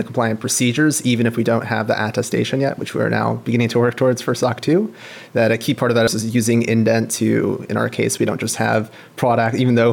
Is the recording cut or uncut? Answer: cut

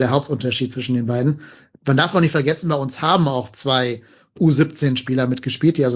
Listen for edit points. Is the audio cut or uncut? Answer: uncut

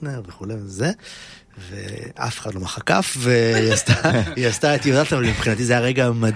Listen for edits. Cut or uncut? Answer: cut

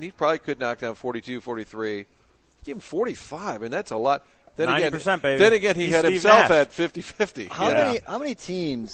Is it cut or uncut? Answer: uncut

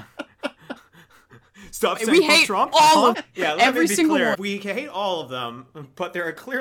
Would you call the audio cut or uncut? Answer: cut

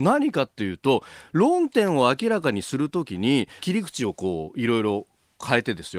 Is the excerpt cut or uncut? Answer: cut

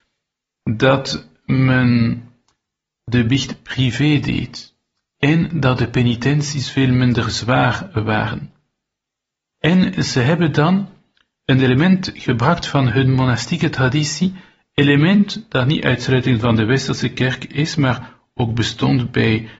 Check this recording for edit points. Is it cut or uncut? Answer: cut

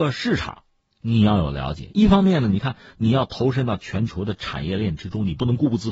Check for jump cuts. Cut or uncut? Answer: uncut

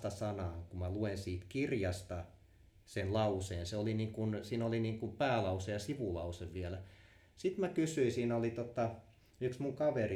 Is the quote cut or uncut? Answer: uncut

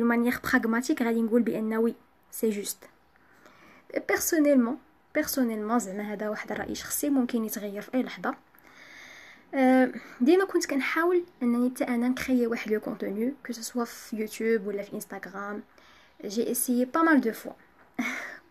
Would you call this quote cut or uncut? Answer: uncut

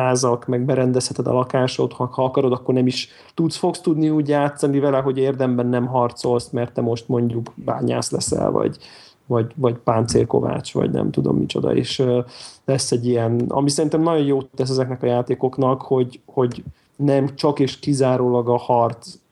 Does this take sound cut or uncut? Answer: uncut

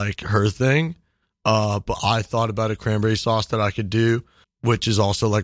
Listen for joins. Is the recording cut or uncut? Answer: cut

